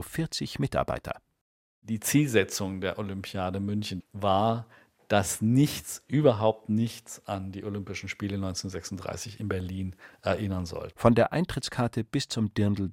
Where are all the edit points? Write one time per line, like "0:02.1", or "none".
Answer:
0:04.0
0:10.9